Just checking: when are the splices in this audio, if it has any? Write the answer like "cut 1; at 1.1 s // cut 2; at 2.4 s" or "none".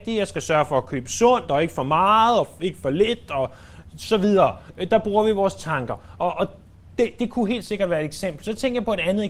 none